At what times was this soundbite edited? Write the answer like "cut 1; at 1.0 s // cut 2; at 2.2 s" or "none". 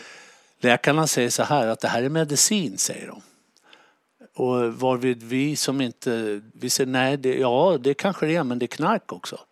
none